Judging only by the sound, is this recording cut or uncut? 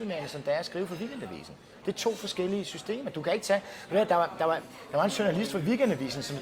uncut